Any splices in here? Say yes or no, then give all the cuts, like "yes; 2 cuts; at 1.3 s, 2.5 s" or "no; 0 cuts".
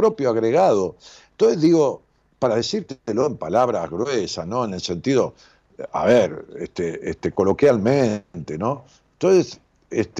no; 0 cuts